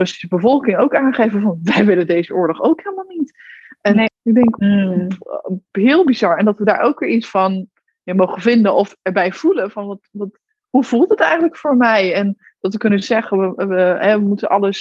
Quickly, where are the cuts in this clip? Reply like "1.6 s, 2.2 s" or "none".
4.1 s